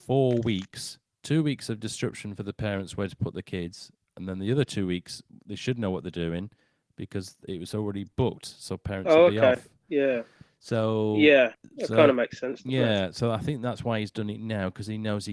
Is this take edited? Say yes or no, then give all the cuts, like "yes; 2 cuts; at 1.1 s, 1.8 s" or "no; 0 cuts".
yes; 1 cut; at 11.7 s